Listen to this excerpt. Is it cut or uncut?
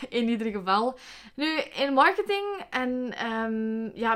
cut